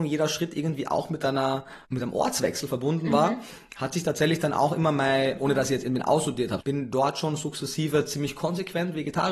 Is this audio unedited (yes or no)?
no